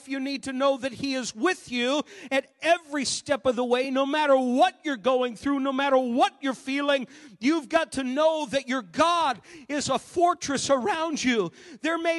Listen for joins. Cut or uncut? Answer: uncut